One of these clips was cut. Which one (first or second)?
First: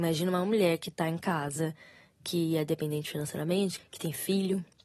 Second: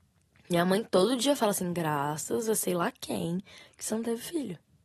first